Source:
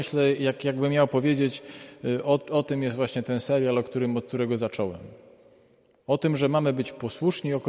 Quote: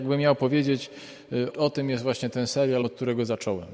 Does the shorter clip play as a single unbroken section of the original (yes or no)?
no